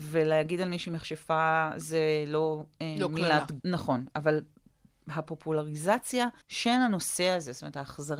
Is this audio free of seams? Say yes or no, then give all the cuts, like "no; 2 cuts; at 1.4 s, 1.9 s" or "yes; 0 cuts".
no; 2 cuts; at 3.6 s, 6.4 s